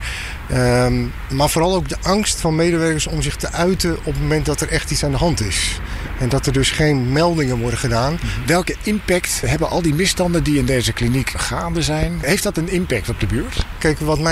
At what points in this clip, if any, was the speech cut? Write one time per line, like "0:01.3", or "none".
0:08.5

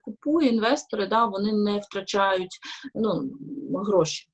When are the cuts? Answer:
none

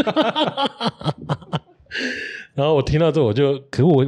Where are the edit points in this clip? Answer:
none

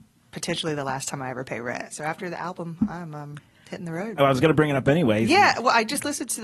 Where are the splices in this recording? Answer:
0:01.9
0:04.2

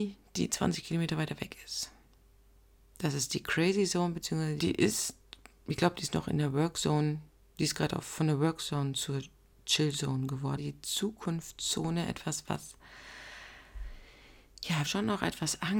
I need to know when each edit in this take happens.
0:04.6
0:10.6
0:14.9

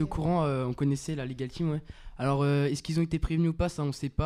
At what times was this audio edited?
none

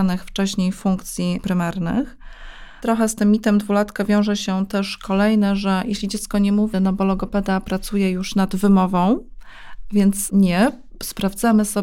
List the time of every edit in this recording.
0:06.7

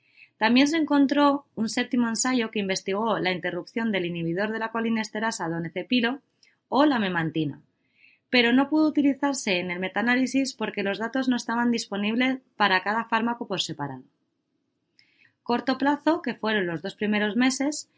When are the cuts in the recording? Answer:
0:15.2

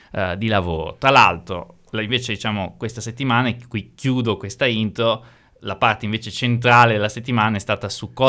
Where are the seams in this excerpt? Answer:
none

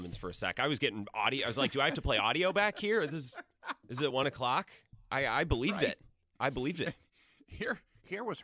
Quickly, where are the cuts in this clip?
none

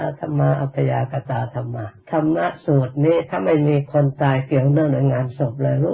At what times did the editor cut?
0:02.0

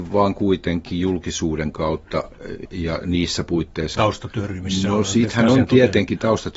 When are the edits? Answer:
0:02.7
0:03.9

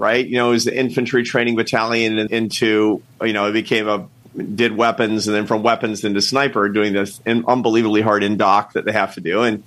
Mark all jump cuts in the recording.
0:02.3

